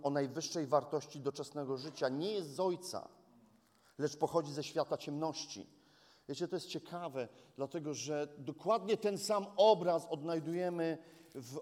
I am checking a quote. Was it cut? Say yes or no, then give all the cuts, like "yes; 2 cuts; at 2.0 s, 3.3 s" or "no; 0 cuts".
no; 0 cuts